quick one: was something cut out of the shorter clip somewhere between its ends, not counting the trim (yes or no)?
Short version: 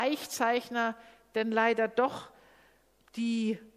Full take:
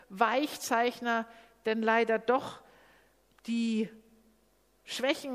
no